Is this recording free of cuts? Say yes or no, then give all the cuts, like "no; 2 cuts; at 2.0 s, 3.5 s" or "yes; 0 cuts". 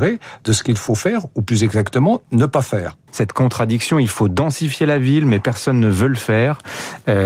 no; 1 cut; at 3.1 s